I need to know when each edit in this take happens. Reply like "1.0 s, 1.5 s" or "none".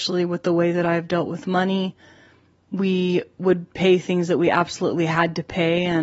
none